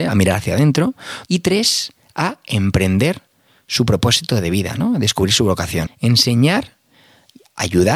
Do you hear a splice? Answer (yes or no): yes